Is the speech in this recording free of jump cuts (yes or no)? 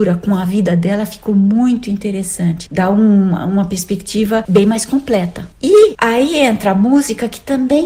yes